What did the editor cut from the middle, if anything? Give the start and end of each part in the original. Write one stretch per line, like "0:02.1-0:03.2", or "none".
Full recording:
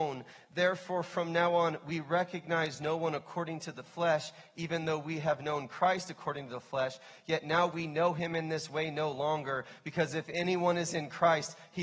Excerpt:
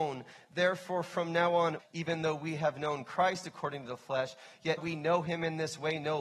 0:01.8-0:04.4
0:07.4-0:07.7